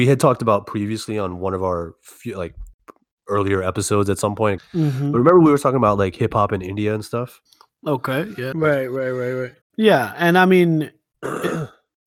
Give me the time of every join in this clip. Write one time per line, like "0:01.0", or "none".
0:04.6
0:08.5
0:09.6